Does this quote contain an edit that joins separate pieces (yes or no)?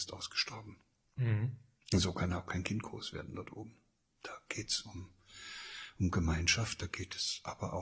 no